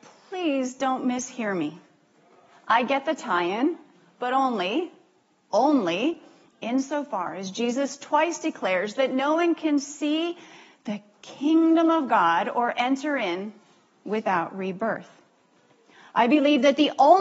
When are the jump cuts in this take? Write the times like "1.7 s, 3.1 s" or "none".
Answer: none